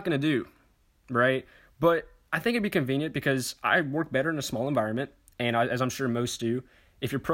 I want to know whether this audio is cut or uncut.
uncut